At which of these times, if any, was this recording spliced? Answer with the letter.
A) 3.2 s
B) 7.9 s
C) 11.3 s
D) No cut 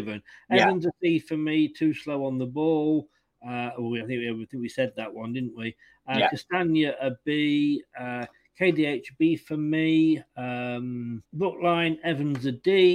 C